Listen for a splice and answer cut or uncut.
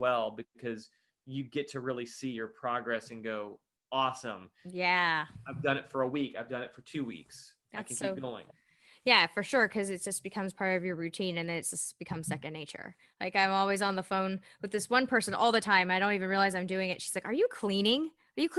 uncut